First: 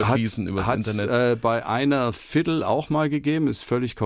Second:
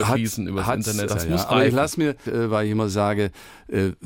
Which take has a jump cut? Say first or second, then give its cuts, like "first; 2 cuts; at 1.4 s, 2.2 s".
second; 2 cuts; at 1.1 s, 2.3 s